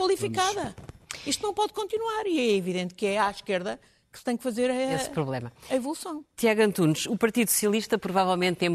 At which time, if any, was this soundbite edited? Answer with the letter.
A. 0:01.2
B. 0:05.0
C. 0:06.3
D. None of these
D